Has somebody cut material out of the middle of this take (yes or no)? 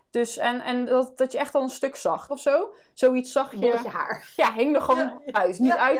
yes